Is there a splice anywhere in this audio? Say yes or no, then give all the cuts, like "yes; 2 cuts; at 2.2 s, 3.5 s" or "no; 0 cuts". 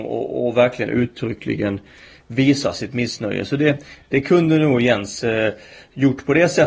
no; 0 cuts